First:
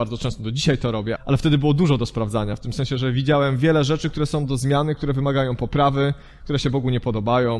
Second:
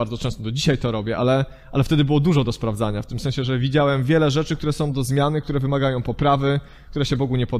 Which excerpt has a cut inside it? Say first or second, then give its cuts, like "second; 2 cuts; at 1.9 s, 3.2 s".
first; 1 cut; at 1.2 s